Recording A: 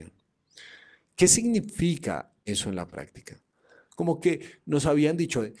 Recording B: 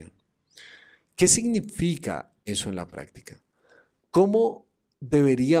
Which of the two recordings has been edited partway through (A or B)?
A